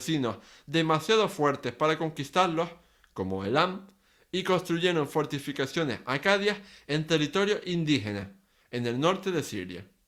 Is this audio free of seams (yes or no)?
no